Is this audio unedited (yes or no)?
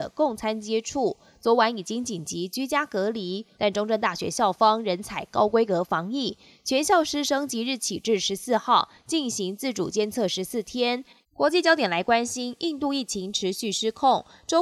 no